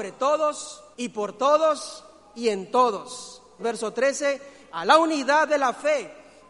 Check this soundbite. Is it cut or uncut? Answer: cut